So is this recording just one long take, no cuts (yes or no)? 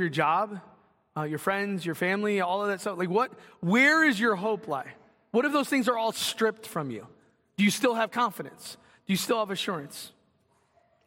yes